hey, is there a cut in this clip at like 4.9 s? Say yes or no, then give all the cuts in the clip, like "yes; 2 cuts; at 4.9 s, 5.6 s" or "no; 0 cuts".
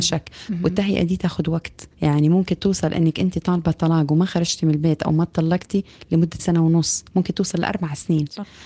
no; 2 cuts; at 1.9 s, 6.4 s